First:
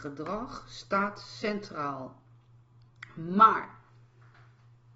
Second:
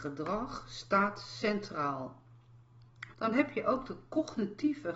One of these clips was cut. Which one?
second; 1 cut; at 3.1 s

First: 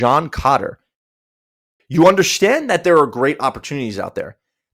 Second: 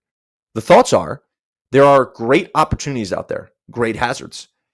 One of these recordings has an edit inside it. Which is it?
first; 1 cut; at 1.8 s

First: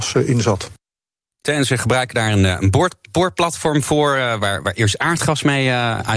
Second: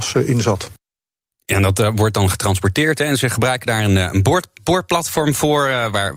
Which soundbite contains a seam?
first; 1 cut; at 1.4 s

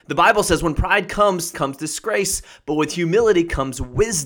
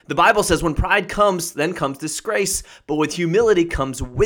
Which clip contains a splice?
first; 1 cut; at 1.5 s

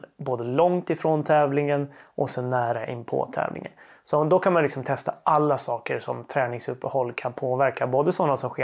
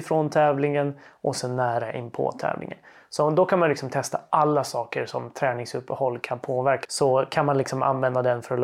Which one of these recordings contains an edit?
second; 1 cut; at 6.9 s

